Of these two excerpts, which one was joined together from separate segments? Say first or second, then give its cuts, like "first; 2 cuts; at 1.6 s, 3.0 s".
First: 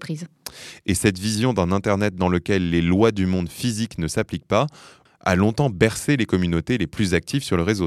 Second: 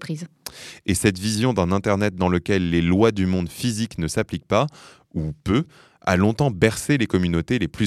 first; 1 cut; at 5.1 s